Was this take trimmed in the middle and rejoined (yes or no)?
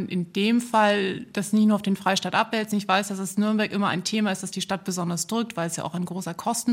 no